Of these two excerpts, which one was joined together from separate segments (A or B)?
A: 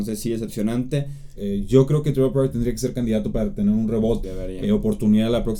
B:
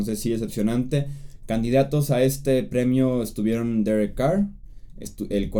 A